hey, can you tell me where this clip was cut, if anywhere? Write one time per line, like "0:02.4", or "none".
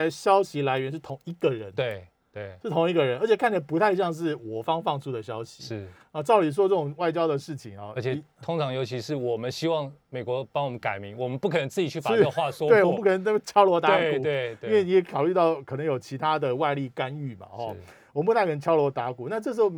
none